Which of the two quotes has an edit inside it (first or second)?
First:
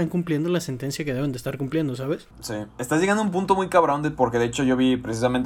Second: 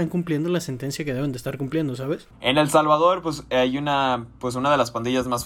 second